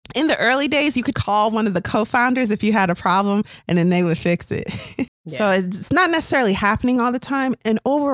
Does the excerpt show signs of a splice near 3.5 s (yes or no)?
no